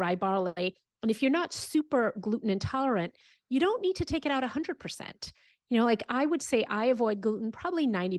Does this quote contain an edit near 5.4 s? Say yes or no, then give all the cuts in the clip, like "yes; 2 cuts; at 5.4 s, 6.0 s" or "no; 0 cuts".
no; 0 cuts